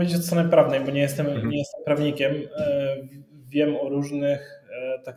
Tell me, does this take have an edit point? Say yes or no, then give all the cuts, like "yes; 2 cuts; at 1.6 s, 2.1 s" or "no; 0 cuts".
no; 0 cuts